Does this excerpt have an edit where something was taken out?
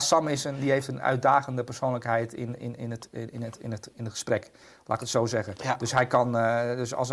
yes; 1 cut; at 2.6 s

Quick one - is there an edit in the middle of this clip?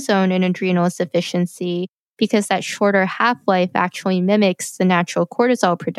no; 0 cuts

